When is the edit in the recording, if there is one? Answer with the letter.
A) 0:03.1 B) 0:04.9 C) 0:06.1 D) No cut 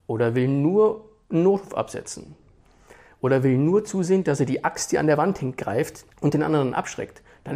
C